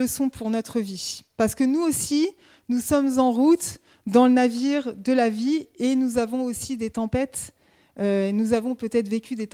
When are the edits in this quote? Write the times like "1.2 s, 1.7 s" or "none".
none